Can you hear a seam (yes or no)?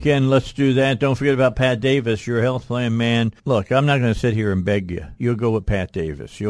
yes